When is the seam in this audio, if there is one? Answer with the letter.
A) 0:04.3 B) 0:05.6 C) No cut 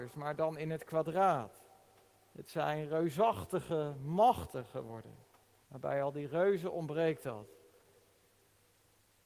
B